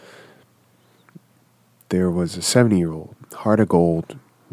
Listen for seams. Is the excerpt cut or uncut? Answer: cut